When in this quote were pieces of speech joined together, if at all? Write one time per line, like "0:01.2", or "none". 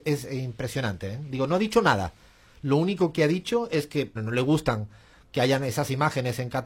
0:04.2